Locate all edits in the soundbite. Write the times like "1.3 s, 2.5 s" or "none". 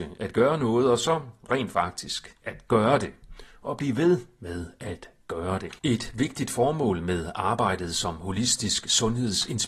5.8 s